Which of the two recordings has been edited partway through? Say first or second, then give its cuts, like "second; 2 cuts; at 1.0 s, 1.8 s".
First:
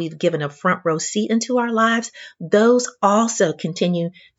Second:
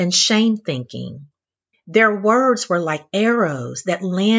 second; 1 cut; at 1.7 s